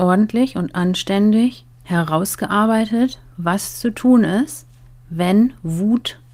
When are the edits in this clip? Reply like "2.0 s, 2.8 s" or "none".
1.7 s